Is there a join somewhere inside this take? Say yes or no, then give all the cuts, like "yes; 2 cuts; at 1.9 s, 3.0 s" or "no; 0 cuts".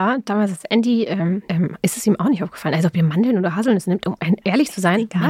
yes; 1 cut; at 1.5 s